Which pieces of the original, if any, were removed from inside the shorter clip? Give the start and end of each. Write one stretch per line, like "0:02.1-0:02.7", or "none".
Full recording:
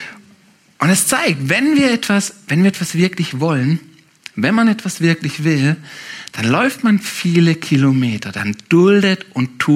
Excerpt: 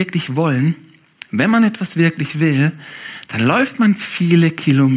none